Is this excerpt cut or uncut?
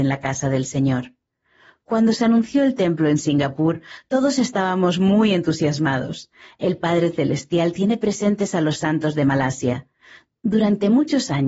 uncut